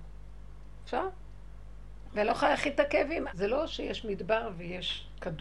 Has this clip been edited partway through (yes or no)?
yes